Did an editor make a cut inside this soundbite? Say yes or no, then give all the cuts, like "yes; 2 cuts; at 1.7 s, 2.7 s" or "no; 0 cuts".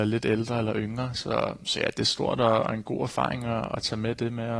no; 0 cuts